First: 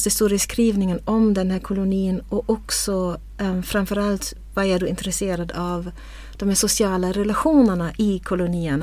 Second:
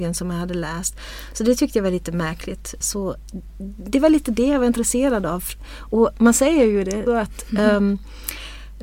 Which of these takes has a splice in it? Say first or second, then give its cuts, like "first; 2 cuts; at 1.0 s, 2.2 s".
second; 2 cuts; at 2.8 s, 7.1 s